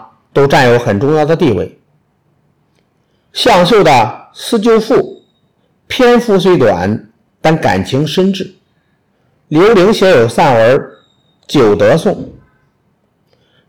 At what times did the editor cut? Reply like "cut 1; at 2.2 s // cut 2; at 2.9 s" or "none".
none